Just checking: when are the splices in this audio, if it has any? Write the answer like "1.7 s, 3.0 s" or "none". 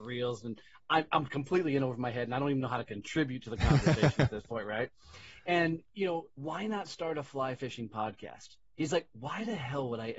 6.3 s, 8.6 s